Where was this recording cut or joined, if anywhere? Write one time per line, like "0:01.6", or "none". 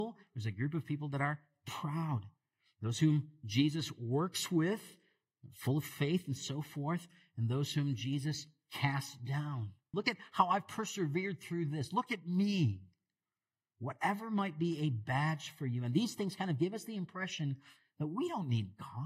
0:09.9